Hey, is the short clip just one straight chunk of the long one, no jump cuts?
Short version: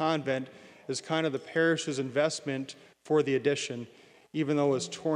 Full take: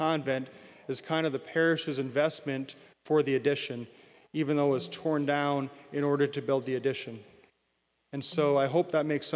yes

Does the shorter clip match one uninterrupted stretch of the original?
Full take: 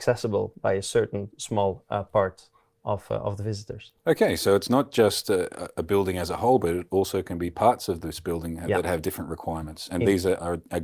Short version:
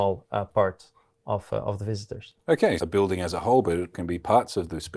no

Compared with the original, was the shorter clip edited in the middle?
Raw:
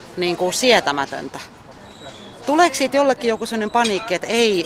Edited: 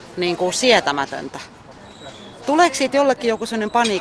no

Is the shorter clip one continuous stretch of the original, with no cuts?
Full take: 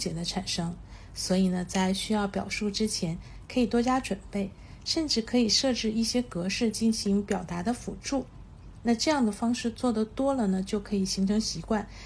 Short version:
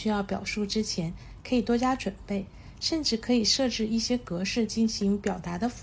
yes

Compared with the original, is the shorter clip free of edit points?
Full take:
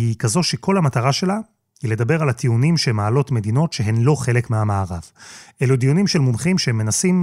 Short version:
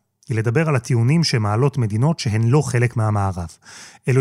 yes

